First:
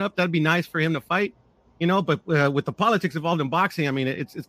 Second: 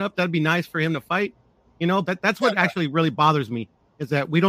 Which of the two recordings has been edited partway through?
second; 1 cut; at 2.0 s

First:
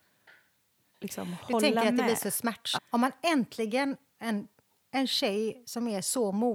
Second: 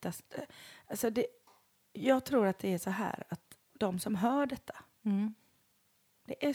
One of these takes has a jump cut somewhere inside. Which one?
first; 2 cuts; at 2.8 s, 4.1 s

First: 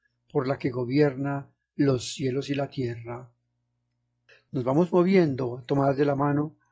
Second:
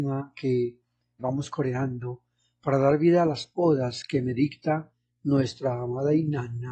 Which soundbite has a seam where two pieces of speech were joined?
second; 1 cut; at 1.2 s

